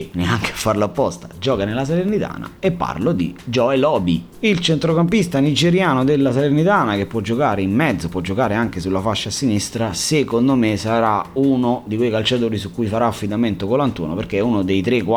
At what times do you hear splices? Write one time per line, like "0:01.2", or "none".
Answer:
none